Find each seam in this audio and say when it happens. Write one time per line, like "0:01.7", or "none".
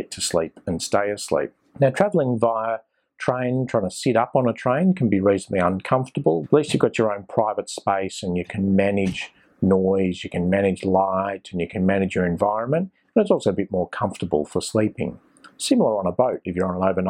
0:01.7
0:06.4